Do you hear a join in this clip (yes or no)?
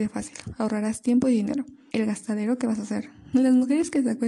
yes